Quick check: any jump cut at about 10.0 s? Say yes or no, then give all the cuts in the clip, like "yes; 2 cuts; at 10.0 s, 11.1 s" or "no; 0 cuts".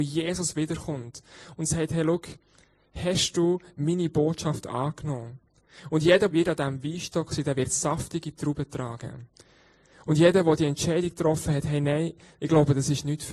no; 1 cut; at 6.3 s